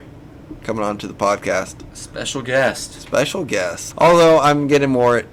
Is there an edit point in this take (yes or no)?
yes